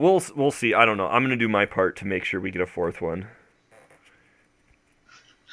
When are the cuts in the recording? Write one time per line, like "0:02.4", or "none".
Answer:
none

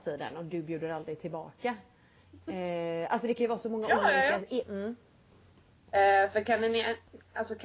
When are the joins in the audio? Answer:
0:04.6

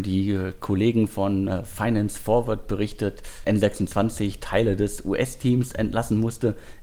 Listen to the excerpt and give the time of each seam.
0:03.4

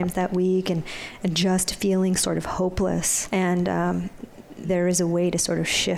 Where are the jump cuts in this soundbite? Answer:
0:03.3
0:04.6

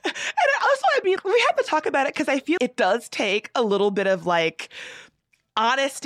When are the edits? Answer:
0:01.2
0:02.6

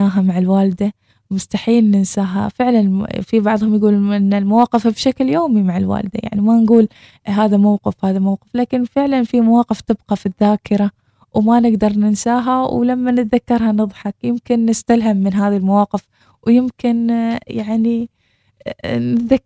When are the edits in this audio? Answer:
none

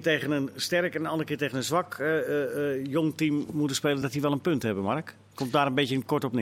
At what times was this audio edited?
none

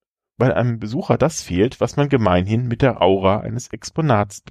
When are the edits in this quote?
none

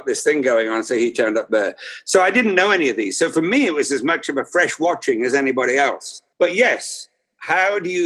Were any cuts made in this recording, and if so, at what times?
0:06.3

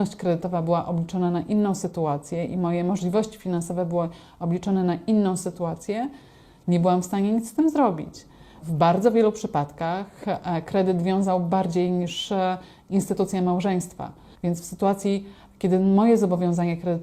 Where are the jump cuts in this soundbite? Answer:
0:08.6
0:14.3

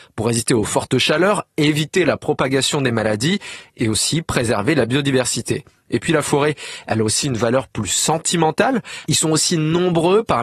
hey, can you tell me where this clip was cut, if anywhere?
0:09.0

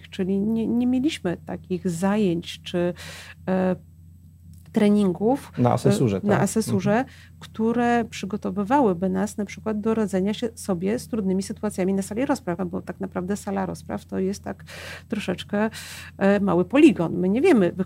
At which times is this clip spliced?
0:12.6

